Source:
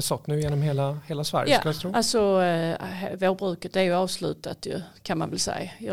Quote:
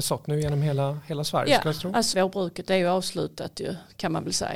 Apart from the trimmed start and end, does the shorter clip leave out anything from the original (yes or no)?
yes